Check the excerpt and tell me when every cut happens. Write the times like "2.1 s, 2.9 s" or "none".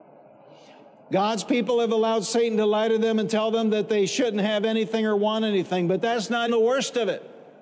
6.5 s